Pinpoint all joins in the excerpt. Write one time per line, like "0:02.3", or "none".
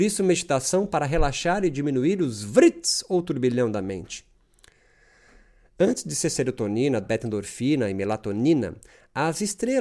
0:07.0